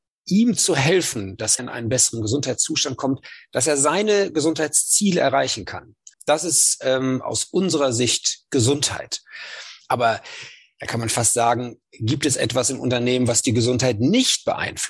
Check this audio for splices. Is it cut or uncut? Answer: cut